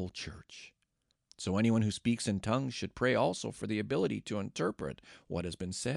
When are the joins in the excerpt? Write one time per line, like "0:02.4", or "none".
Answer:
none